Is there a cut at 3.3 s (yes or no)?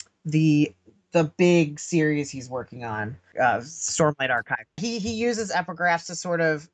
yes